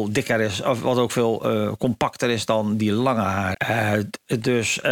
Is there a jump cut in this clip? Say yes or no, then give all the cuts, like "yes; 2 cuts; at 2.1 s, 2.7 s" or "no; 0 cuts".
yes; 1 cut; at 3.5 s